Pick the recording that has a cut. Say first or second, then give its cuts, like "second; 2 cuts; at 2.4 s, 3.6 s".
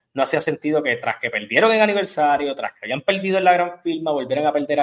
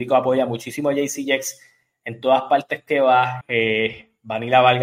second; 1 cut; at 3.4 s